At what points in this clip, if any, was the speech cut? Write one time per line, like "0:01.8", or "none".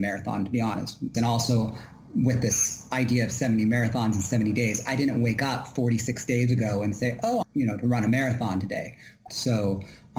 0:01.1
0:07.4
0:09.3